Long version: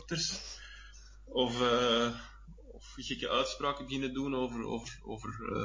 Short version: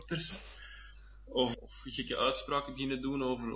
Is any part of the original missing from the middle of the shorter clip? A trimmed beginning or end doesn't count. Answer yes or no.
yes